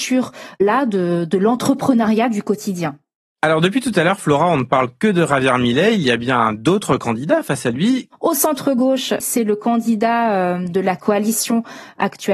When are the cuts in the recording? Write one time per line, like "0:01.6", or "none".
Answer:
0:08.1
0:09.2